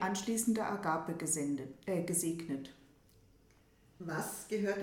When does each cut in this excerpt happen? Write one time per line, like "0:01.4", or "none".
none